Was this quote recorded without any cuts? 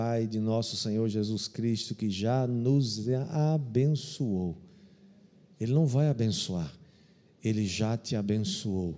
yes; 0 cuts

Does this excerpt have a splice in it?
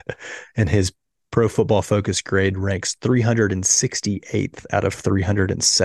no; 0 cuts

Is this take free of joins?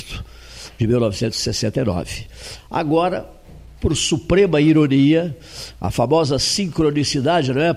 yes; 0 cuts

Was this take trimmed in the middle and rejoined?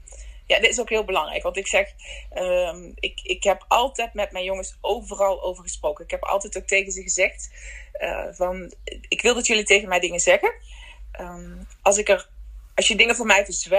no; 0 cuts

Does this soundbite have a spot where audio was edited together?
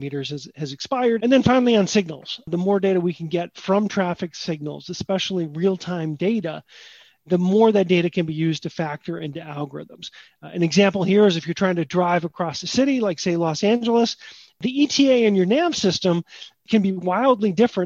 yes; 1 cut; at 1.2 s

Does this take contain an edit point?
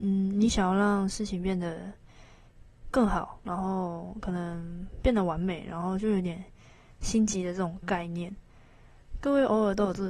no; 0 cuts

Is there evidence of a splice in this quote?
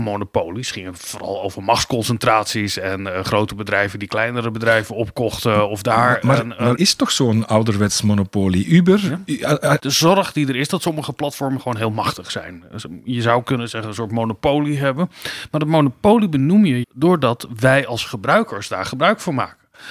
yes; 3 cuts; at 6.8 s, 9.8 s, 16.8 s

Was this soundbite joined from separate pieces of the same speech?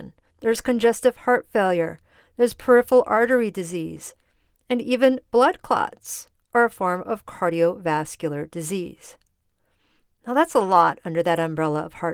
no; 0 cuts

